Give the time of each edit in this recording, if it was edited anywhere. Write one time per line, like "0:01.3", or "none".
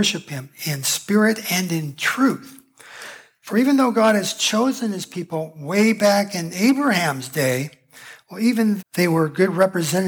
0:08.8